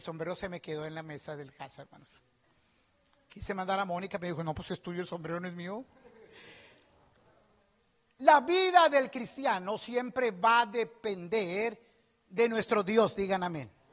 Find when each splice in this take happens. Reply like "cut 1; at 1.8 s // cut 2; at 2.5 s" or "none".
none